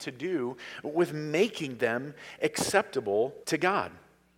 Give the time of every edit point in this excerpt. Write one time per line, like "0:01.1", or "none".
0:03.4